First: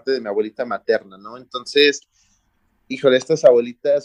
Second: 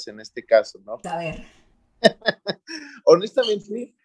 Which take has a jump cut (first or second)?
second